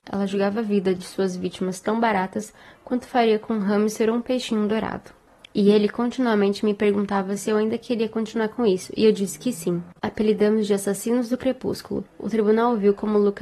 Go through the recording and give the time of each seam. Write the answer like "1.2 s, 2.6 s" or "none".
5.5 s, 12.1 s